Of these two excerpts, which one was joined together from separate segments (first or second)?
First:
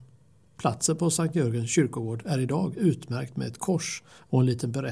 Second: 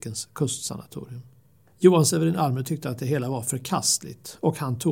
second